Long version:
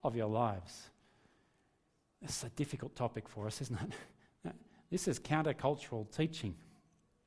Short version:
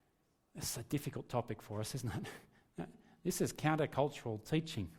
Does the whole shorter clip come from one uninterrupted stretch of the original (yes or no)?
yes